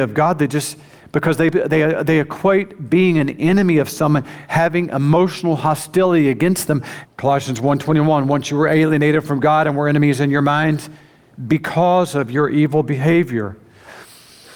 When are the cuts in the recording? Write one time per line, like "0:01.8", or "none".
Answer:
0:07.0